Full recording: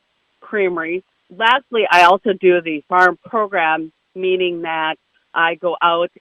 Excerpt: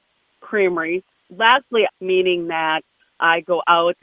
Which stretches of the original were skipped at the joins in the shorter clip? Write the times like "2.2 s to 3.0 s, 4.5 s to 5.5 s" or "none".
1.9 s to 4.0 s